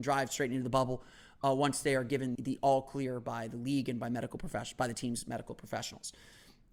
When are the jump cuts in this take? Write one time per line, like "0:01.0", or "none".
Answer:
0:02.4